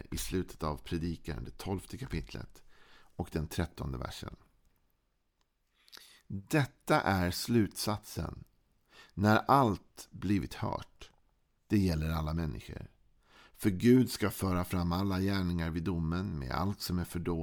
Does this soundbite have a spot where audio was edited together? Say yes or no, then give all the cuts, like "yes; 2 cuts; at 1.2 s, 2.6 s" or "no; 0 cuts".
yes; 1 cut; at 11.6 s